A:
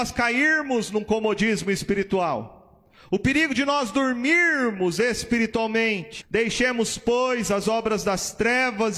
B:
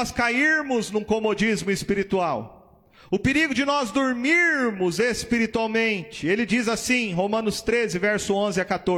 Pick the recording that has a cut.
A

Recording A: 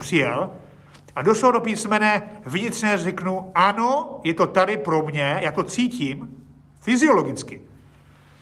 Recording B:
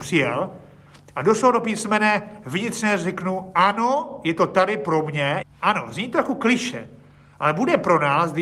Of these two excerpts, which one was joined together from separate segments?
B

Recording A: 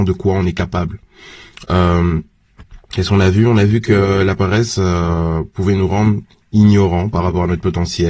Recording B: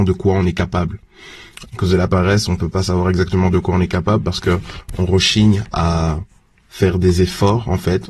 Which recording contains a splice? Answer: B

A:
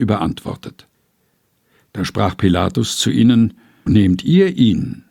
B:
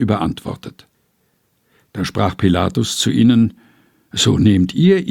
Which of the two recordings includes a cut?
A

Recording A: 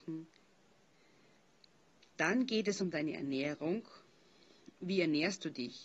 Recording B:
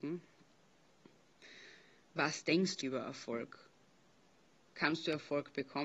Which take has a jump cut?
B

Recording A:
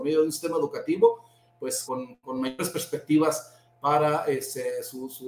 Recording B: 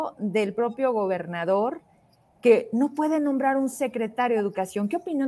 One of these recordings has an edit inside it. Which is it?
A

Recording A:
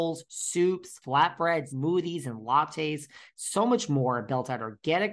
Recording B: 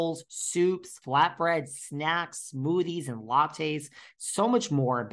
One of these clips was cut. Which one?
A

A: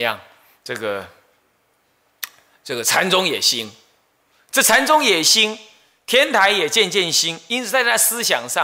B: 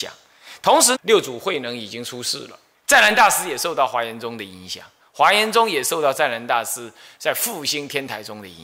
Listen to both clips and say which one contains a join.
B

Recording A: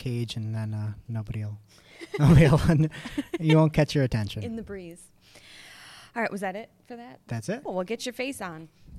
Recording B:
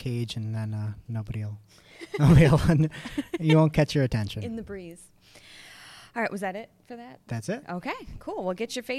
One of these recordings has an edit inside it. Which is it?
A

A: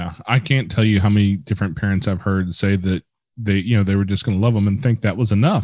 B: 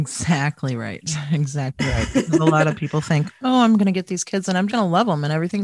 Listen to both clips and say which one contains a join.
B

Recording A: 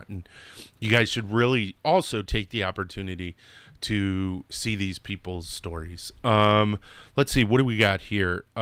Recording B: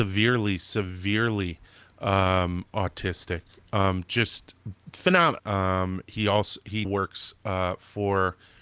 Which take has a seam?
B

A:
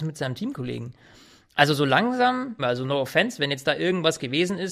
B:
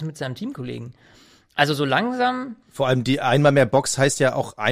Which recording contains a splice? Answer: A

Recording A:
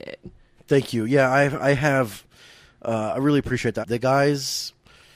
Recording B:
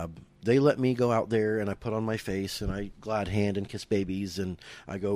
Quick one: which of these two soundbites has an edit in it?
A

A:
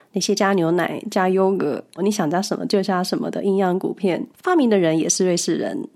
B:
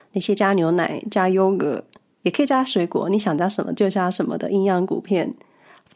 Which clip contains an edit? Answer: A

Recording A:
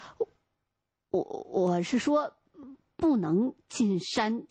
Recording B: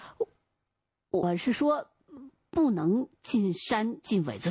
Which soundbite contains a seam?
B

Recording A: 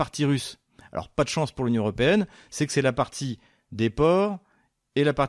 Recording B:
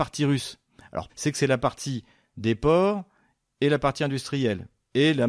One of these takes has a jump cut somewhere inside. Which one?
B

